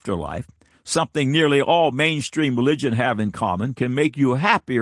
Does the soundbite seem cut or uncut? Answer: uncut